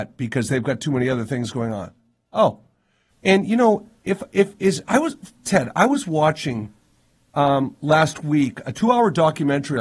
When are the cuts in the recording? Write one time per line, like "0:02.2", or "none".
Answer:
0:03.1